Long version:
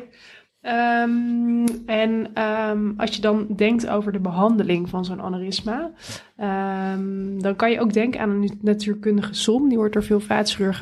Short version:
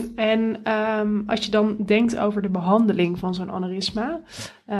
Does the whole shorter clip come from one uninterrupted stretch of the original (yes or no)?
yes